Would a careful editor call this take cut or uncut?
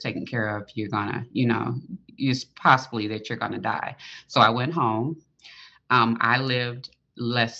uncut